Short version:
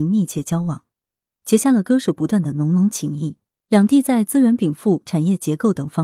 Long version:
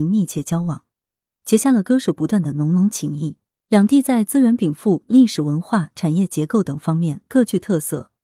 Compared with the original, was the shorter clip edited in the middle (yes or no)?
yes